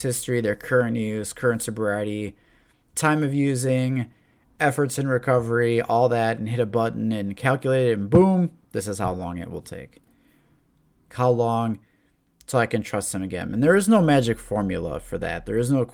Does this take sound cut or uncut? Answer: cut